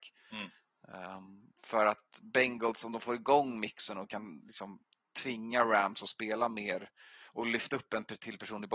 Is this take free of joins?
yes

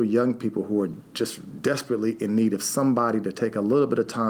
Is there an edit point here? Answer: no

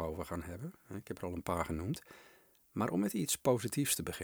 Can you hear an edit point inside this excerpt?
no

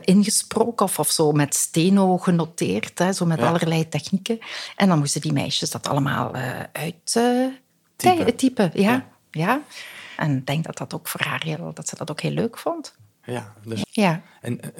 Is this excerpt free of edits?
no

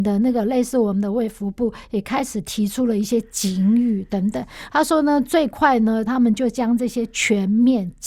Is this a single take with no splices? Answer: no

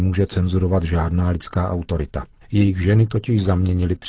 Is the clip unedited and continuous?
no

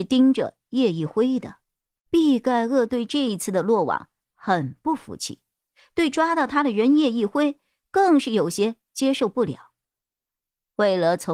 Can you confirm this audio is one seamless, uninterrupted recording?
no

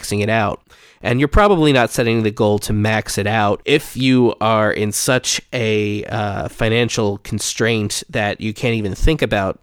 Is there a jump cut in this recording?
no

